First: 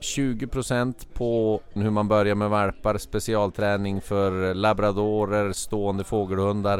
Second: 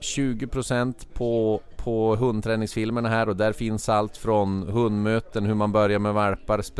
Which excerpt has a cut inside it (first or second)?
first